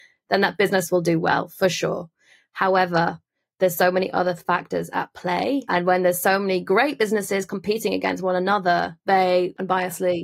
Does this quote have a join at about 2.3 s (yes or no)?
no